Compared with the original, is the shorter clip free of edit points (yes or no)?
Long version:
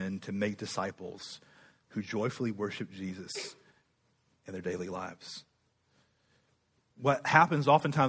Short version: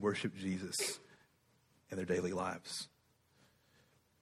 yes